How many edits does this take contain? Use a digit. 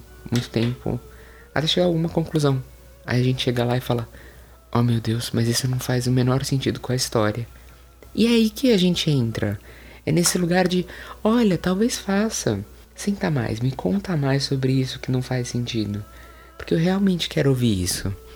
1